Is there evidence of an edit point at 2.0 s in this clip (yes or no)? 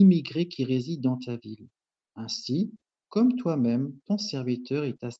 no